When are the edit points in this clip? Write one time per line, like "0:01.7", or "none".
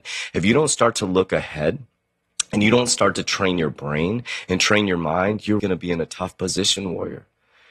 0:05.6